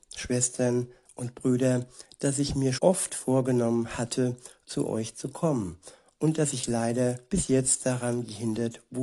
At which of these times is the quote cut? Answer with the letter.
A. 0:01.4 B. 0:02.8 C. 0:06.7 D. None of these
B